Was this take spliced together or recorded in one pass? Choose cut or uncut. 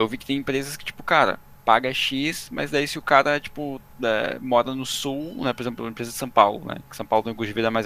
uncut